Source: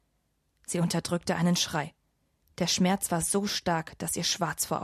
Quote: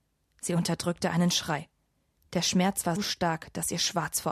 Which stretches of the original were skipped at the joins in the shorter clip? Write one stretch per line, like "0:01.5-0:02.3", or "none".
0:03.2-0:03.4

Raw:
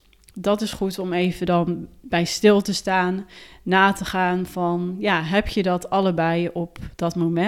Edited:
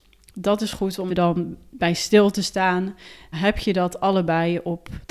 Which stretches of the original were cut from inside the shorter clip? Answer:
0:01.1-0:01.4
0:03.6-0:05.2

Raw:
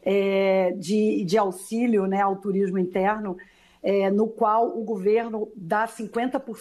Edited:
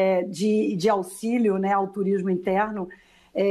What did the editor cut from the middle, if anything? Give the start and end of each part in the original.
none

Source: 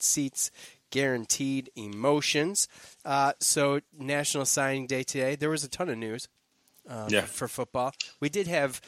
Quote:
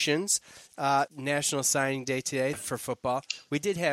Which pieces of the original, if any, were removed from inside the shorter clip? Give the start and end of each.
0:03.3-0:03.9
0:05.4-0:07.2

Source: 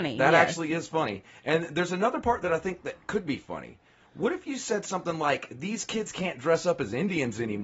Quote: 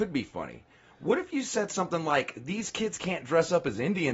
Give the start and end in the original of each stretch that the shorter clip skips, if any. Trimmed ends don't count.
none

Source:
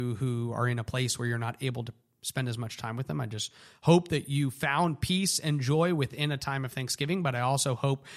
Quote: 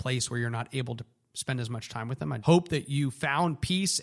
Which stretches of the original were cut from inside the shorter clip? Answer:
0:03.3-0:03.8

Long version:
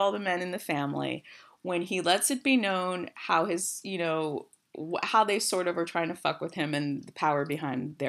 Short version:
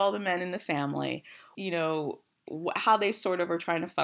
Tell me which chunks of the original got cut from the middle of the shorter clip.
0:01.5-0:03.8

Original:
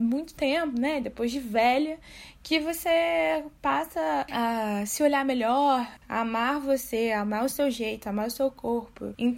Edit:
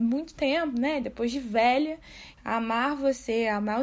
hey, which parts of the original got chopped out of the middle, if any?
0:02.3-0:06.0

